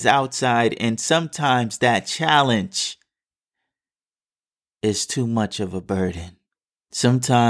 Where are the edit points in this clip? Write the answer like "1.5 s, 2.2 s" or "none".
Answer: none